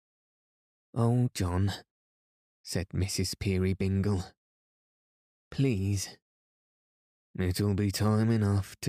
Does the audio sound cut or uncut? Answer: cut